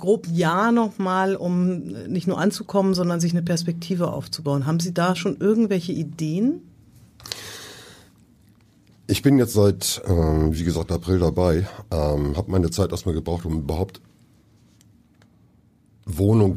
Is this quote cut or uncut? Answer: uncut